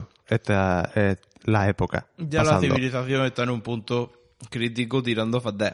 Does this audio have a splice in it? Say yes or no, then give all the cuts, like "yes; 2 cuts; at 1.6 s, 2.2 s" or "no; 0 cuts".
no; 0 cuts